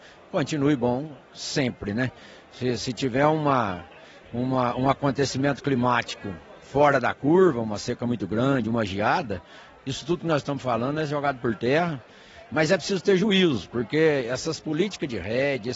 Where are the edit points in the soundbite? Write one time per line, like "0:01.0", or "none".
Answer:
none